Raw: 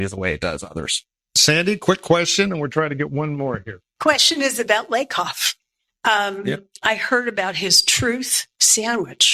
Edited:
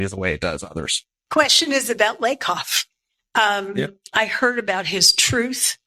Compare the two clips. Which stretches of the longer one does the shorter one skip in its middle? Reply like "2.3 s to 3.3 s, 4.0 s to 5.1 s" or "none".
1.2 s to 3.9 s

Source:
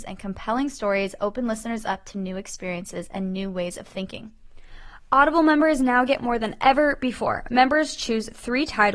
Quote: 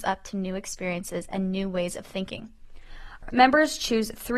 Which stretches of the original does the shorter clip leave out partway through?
5.0 s to 7.4 s

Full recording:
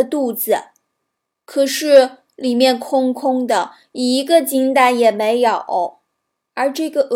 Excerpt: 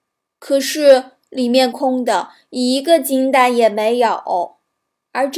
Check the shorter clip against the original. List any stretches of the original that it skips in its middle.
2.8 s to 3.1 s

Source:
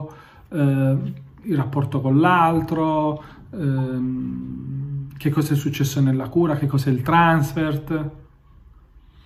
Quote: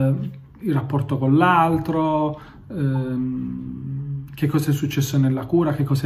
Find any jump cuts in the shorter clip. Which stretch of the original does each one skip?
none

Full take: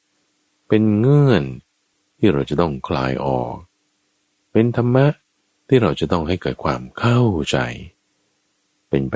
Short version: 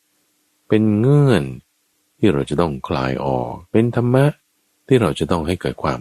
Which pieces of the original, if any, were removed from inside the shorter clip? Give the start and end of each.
3.7 s to 4.5 s

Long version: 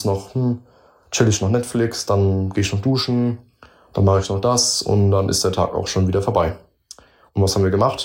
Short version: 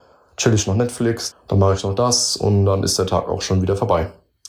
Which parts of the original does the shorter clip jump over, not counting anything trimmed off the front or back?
2.0 s to 3.8 s

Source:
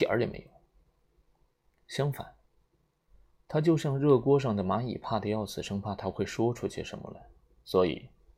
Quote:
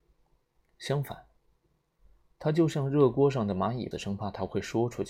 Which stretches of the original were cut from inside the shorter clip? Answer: 5.0 s to 5.6 s

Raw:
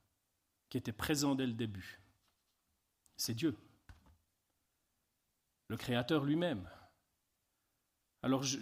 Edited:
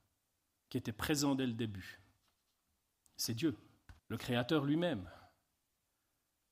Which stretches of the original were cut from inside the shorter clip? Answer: 4.0 s to 5.6 s

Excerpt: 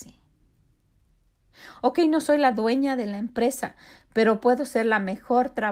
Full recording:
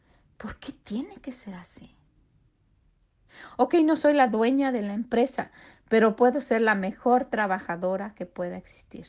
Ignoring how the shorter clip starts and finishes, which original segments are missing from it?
none

